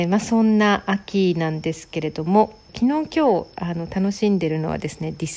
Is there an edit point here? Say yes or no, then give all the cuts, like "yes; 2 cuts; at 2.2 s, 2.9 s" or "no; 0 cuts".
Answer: yes; 1 cut; at 2.7 s